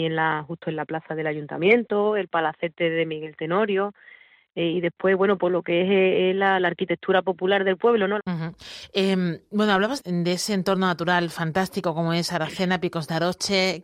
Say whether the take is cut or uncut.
cut